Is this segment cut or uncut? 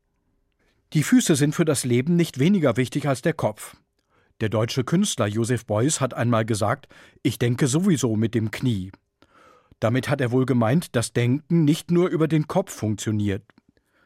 uncut